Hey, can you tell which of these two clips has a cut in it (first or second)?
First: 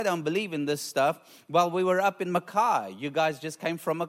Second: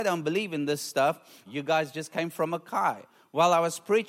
second